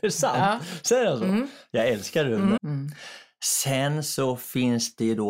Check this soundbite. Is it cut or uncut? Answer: cut